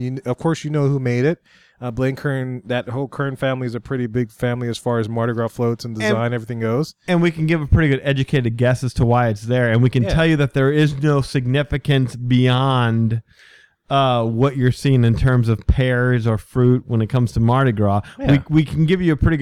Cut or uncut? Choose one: uncut